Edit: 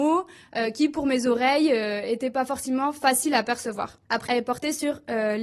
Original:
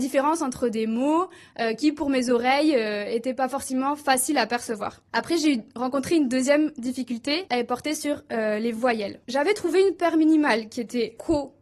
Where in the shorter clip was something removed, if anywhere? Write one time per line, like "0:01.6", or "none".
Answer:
0:04.3